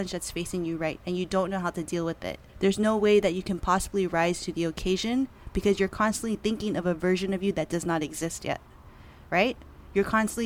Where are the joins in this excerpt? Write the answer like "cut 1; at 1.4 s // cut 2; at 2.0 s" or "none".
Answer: cut 1; at 1.0 s // cut 2; at 2.5 s